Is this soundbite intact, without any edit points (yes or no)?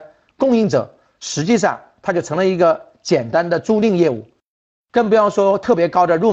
yes